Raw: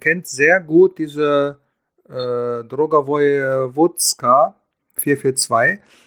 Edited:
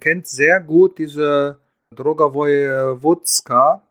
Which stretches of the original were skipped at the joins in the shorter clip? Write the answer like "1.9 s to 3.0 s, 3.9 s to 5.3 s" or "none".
1.9 s to 2.6 s